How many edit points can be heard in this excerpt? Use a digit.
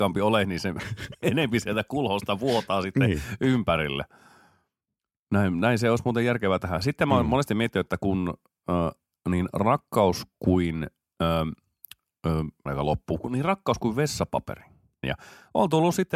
2